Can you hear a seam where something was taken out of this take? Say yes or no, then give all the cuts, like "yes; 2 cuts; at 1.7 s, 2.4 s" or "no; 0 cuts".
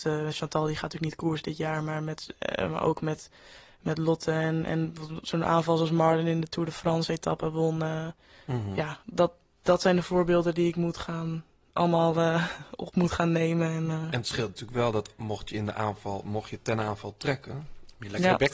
no; 0 cuts